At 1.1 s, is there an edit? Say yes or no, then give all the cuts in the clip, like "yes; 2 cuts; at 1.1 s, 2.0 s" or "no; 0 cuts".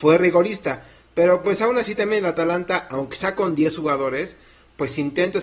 no; 0 cuts